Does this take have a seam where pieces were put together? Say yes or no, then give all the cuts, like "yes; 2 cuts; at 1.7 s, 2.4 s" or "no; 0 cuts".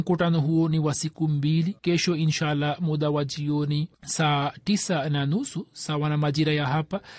yes; 2 cuts; at 1.8 s, 3.9 s